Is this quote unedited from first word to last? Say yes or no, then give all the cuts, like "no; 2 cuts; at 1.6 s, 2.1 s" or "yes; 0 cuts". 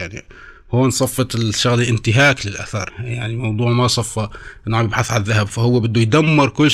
no; 1 cut; at 2.9 s